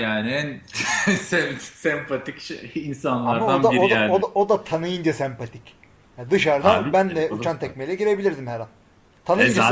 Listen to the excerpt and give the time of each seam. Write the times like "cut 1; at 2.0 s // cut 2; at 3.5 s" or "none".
none